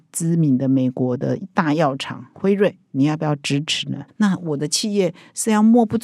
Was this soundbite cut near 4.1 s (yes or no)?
yes